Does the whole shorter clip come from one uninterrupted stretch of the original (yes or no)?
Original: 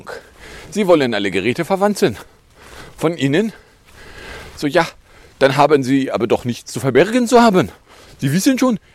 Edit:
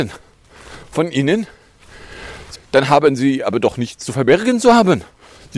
no